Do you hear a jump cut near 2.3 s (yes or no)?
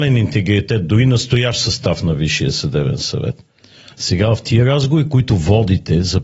no